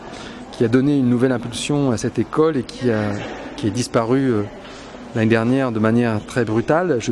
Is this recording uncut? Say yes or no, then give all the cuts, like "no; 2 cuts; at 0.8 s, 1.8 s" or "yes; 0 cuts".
yes; 0 cuts